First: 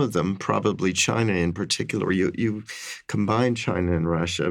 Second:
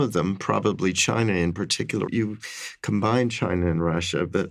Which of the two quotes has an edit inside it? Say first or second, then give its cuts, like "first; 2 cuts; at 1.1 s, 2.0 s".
second; 1 cut; at 2.1 s